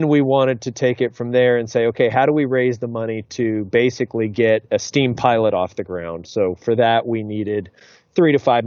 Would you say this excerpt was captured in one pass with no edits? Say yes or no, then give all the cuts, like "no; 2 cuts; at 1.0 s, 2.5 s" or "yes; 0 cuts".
yes; 0 cuts